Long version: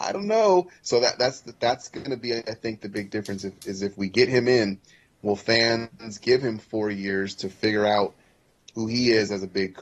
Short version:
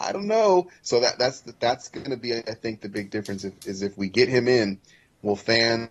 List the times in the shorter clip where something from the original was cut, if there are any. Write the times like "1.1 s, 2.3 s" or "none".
none